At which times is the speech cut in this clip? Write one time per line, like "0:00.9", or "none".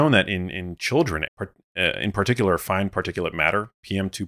0:01.3